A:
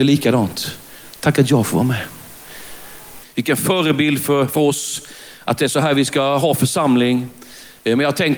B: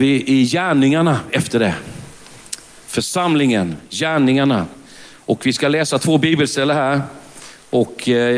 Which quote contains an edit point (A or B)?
A